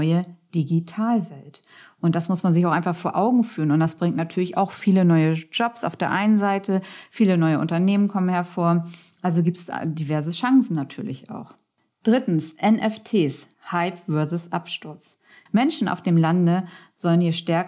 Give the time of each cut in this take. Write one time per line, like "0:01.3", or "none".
0:13.5
0:15.5